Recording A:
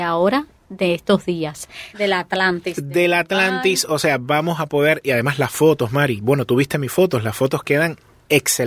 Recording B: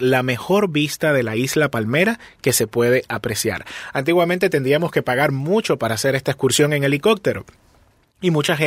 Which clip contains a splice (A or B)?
A